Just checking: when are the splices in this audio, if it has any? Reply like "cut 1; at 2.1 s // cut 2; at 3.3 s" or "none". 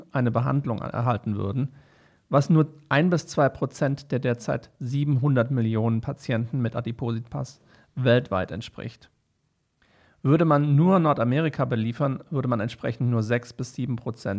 none